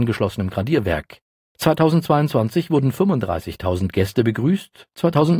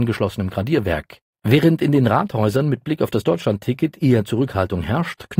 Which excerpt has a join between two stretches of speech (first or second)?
second